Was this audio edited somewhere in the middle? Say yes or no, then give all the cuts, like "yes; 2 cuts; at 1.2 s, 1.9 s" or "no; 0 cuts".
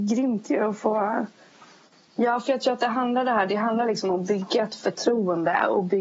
no; 0 cuts